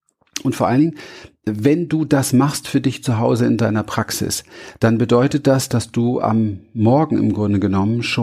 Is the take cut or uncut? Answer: uncut